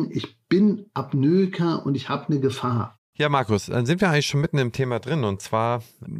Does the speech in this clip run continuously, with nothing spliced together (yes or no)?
no